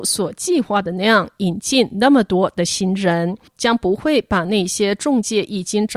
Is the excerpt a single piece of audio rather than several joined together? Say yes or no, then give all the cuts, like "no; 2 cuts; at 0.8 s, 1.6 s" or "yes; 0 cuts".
no; 1 cut; at 3.5 s